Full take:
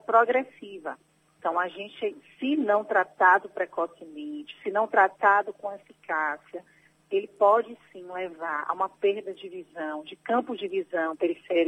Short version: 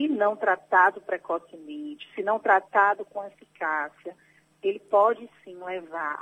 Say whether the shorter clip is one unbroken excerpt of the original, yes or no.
yes